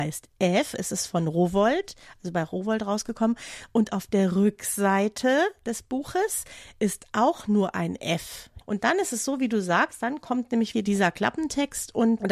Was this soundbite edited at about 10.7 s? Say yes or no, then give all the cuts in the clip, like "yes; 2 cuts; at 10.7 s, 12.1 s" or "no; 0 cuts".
yes; 2 cuts; at 8.6 s, 10.7 s